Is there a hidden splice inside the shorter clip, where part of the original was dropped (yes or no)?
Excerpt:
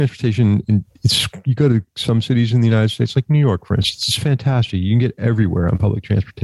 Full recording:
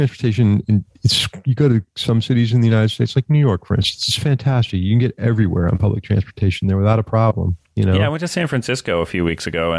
no